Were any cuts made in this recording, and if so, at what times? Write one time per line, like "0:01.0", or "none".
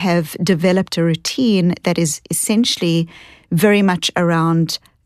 none